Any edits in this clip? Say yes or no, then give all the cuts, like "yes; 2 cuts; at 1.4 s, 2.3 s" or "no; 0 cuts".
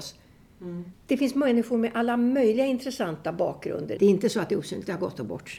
yes; 2 cuts; at 0.9 s, 4.0 s